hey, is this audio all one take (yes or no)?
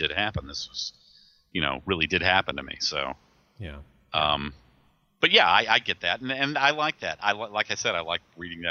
yes